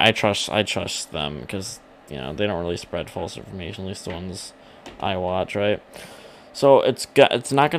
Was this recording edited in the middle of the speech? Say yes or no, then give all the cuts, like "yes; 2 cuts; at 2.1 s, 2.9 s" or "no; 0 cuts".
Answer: no; 0 cuts